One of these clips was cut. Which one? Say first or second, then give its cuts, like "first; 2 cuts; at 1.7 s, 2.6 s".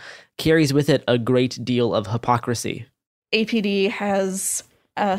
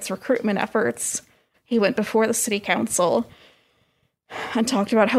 second; 1 cut; at 1.5 s